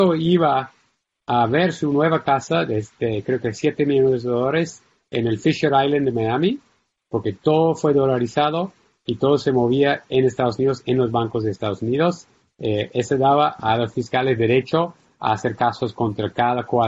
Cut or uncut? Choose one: cut